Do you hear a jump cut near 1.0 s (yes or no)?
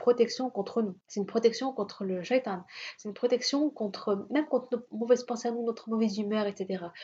yes